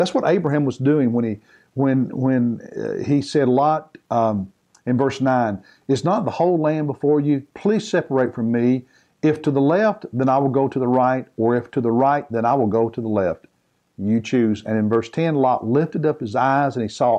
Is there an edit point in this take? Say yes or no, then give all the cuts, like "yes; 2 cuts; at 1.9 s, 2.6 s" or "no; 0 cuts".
no; 0 cuts